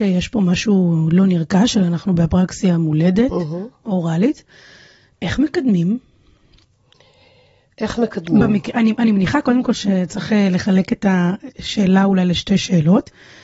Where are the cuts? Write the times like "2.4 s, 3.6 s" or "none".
none